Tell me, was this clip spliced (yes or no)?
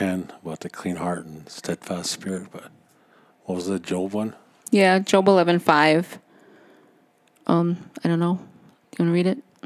no